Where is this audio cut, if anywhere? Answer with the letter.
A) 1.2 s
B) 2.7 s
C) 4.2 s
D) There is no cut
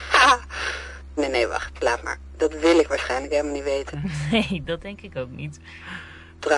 A